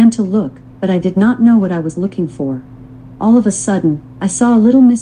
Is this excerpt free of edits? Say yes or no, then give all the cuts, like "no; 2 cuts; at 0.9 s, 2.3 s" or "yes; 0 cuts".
no; 1 cut; at 3.2 s